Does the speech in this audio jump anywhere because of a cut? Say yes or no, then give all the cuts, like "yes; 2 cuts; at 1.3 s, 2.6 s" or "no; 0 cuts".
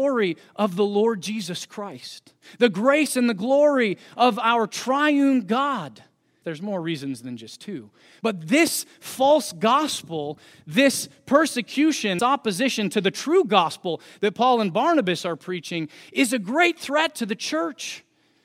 yes; 3 cuts; at 6.4 s, 8.2 s, 12.2 s